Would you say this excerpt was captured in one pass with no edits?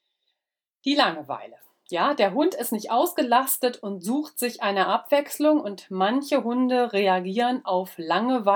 yes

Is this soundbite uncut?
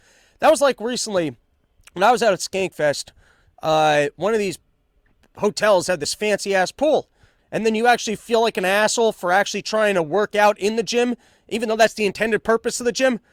no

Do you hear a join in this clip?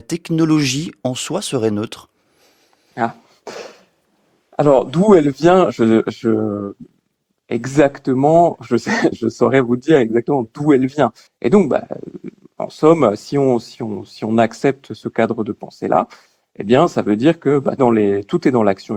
yes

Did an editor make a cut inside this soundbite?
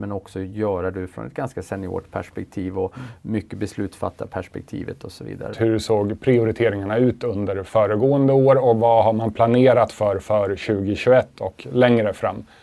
yes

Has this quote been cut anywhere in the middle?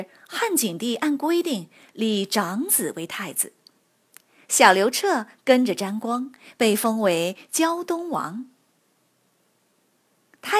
no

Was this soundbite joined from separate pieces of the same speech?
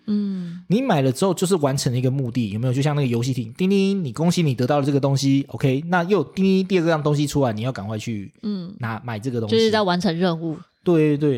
no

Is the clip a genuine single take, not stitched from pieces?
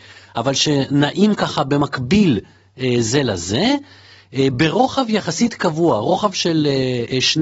yes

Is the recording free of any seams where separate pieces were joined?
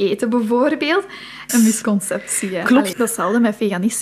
no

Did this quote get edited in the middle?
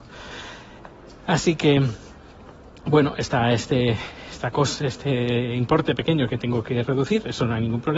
no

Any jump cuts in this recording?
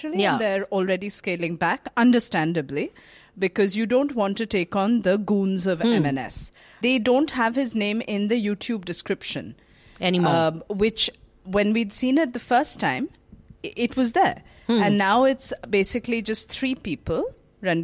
yes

